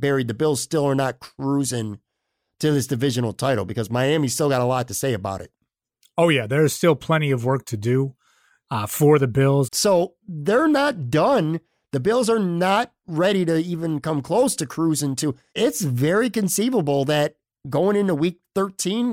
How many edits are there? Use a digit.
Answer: 2